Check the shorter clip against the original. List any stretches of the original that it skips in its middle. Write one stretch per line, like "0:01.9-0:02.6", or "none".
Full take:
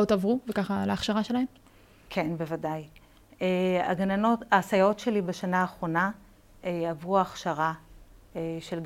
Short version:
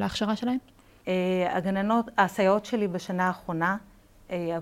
0:01.9-0:03.3